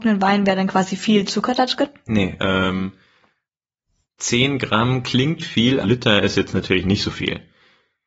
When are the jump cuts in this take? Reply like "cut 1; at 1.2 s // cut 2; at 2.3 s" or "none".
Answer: cut 1; at 2.4 s // cut 2; at 5.8 s

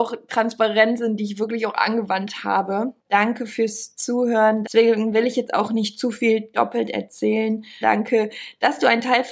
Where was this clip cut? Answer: cut 1; at 3.0 s // cut 2; at 4.6 s // cut 3; at 7.8 s

